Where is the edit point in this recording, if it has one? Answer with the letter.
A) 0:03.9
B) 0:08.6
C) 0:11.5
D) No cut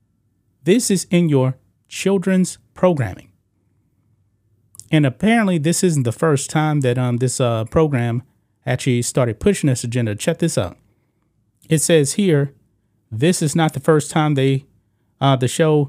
D